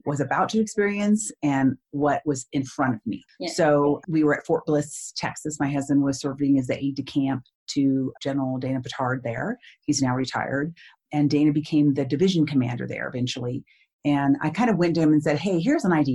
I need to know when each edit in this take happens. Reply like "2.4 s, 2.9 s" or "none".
none